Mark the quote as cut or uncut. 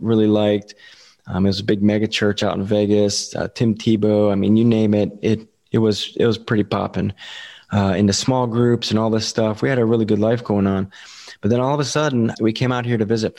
cut